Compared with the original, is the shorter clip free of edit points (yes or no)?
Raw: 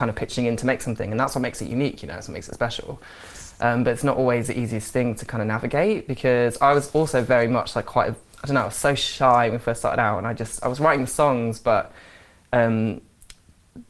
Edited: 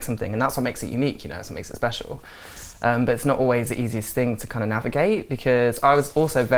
yes